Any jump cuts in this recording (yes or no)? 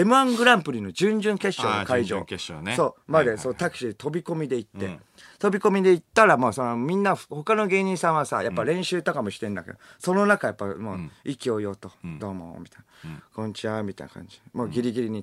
no